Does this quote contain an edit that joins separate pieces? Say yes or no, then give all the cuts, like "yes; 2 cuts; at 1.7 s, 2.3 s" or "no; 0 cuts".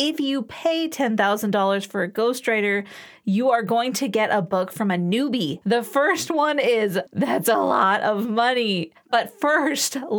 yes; 3 cuts; at 5.6 s, 7.1 s, 9.0 s